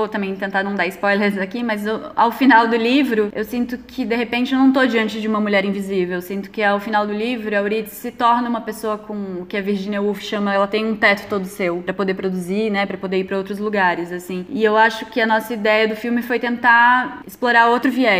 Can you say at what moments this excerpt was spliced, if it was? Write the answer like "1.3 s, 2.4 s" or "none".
none